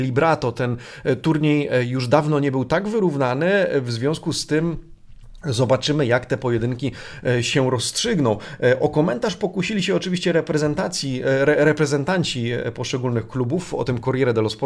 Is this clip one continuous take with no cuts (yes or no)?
yes